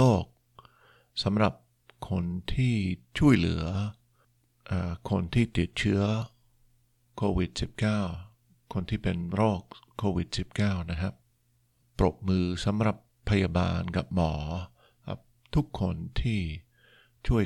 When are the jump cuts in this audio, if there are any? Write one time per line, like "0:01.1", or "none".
none